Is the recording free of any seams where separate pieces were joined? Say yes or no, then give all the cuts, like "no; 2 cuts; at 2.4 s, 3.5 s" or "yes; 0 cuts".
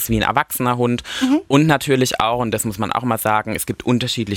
yes; 0 cuts